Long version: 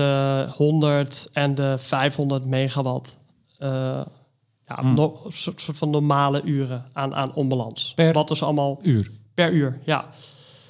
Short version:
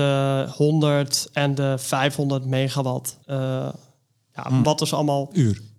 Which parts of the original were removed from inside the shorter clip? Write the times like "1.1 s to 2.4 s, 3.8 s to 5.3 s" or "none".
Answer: 3.2 s to 3.6 s, 5.0 s to 8.1 s